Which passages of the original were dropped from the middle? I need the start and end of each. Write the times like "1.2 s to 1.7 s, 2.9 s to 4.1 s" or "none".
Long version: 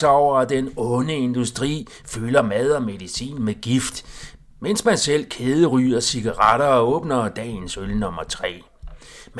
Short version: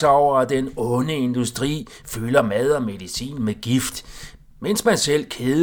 none